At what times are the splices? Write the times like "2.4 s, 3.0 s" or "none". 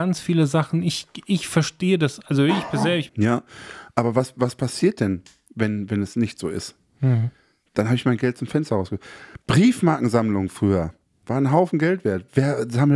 3.1 s